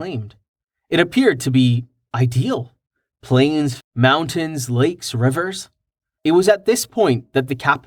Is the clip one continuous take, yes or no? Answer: no